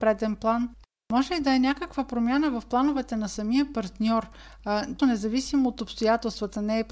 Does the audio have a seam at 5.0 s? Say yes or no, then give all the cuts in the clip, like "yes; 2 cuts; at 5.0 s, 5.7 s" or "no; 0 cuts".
yes; 1 cut; at 5.0 s